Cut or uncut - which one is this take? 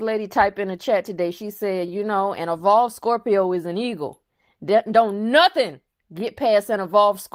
uncut